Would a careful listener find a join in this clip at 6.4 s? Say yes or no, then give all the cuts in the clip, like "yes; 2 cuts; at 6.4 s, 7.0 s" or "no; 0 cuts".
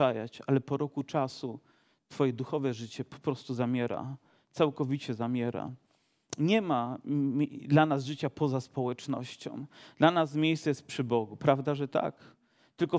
no; 0 cuts